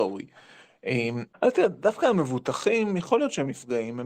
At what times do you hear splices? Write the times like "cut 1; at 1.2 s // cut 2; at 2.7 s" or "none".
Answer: cut 1; at 1.3 s